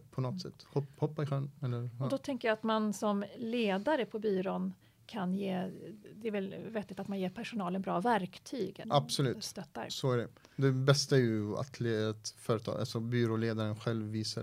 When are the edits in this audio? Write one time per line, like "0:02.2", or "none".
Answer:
0:08.8